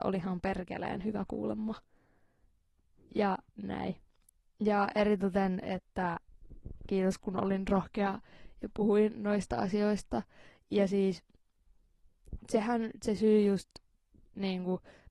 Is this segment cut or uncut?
uncut